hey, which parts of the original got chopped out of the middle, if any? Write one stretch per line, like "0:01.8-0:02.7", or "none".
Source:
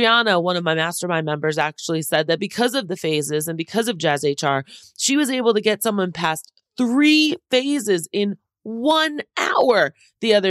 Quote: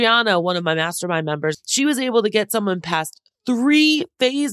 0:01.5-0:04.9

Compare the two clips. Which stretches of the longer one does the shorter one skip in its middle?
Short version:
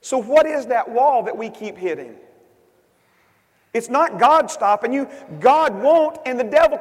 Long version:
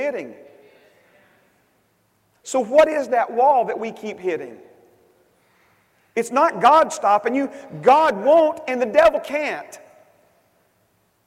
none

